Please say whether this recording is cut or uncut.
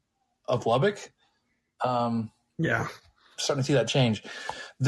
cut